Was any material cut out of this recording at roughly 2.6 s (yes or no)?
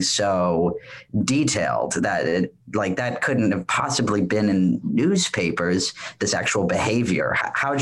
yes